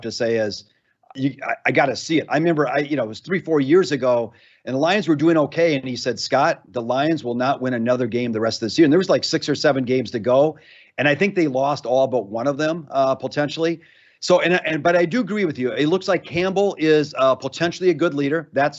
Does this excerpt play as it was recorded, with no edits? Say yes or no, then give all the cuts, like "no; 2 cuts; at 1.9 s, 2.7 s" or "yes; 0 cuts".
yes; 0 cuts